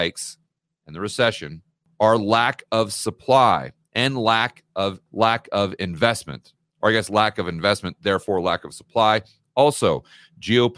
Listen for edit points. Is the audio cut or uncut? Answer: cut